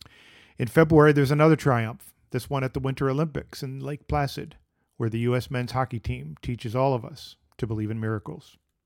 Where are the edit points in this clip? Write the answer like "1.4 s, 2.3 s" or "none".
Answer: none